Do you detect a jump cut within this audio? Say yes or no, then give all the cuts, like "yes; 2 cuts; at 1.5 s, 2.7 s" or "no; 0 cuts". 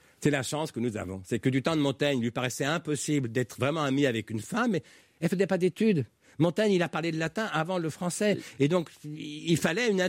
no; 0 cuts